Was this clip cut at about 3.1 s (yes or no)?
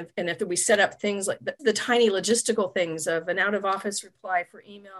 no